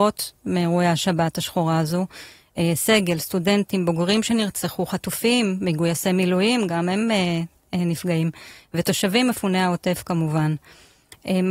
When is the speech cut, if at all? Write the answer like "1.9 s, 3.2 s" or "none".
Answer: none